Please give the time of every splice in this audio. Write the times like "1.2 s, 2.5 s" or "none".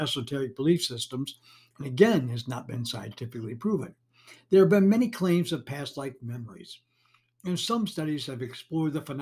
1.7 s